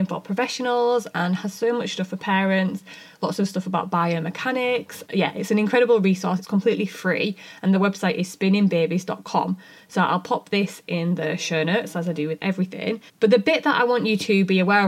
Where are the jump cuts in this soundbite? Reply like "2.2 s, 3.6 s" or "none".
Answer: 5.1 s, 13.1 s